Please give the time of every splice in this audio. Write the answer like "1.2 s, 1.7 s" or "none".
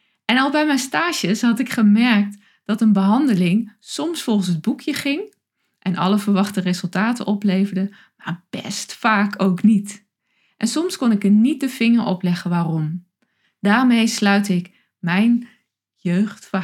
13.4 s

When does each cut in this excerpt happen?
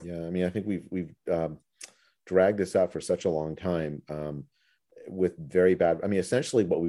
none

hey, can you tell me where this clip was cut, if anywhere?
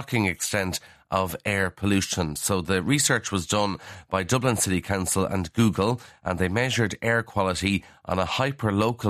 none

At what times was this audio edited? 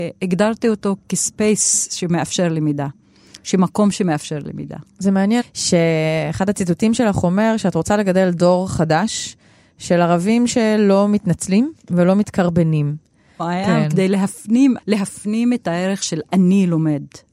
5.4 s, 13.4 s, 14.8 s

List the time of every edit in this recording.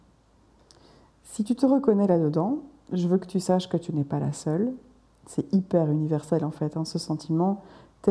none

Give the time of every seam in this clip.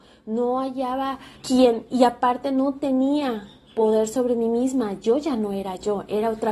1.3 s

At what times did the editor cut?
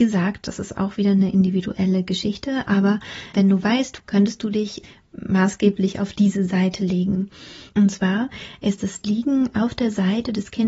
4.0 s, 7.7 s

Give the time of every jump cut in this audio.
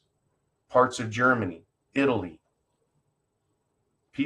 1.8 s

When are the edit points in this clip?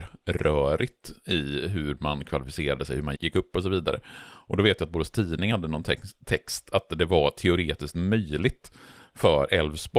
3.2 s

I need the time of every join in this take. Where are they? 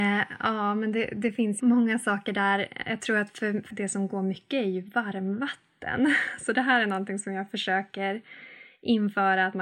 1.6 s, 3.7 s

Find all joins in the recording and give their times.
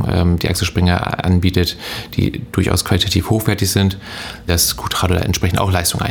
4.5 s

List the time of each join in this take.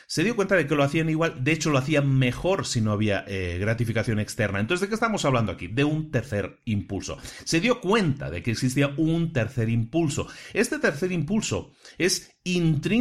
none

